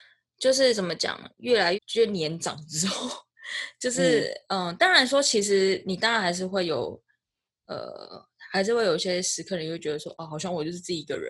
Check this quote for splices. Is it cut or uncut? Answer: cut